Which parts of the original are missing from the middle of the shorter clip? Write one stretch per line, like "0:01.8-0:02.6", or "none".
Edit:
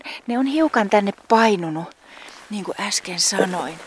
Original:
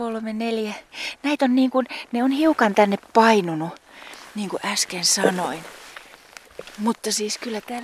none